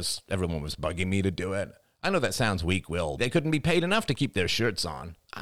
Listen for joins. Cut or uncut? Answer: cut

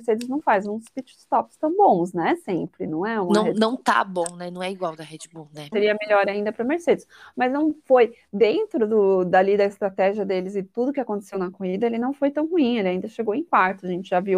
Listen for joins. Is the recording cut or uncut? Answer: cut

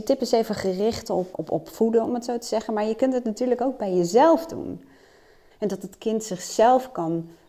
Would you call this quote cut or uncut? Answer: cut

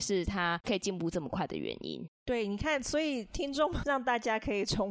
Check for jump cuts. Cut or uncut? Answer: cut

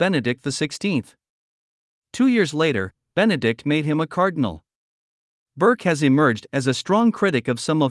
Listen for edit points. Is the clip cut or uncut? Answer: uncut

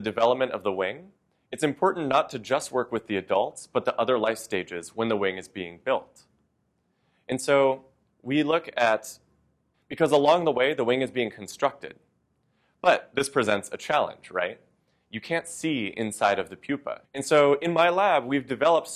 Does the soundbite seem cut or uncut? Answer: cut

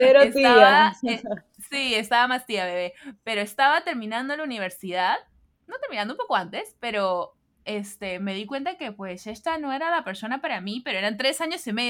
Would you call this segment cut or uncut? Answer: uncut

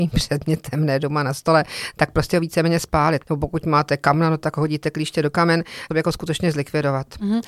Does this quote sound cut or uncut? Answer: cut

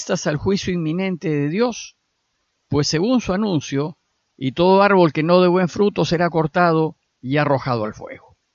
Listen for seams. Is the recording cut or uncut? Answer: cut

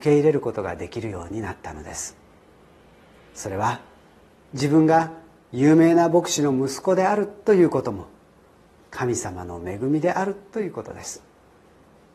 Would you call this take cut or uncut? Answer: uncut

